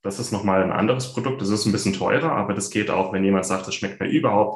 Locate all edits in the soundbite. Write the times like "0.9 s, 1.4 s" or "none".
none